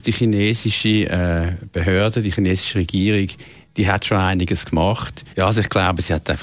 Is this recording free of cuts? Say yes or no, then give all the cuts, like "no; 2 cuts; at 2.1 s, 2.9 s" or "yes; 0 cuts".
no; 1 cut; at 5.3 s